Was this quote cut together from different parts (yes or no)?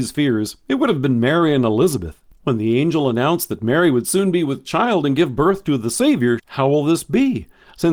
yes